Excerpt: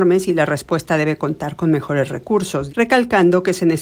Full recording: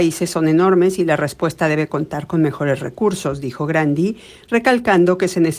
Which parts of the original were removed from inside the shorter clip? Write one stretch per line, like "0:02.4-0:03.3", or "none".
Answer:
0:03.4-0:04.4